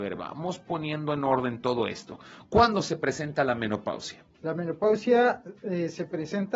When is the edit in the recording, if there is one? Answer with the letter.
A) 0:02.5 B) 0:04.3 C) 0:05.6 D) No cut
D